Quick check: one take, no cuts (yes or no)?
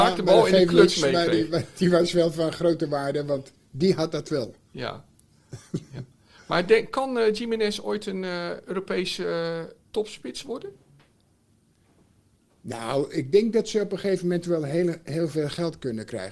yes